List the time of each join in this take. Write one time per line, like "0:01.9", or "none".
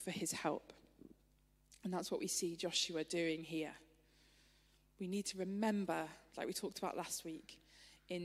none